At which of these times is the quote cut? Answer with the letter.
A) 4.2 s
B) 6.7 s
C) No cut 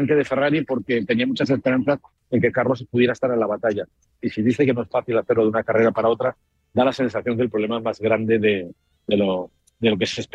A